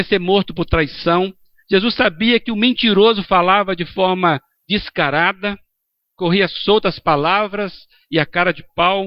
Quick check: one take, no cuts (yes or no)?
yes